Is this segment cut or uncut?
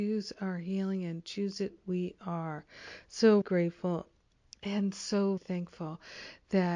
cut